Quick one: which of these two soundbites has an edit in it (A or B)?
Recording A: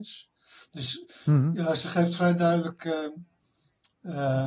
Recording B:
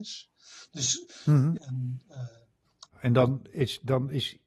B